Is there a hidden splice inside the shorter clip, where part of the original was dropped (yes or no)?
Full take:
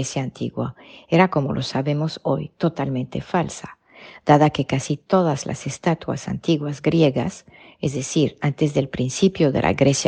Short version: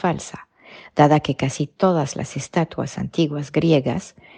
no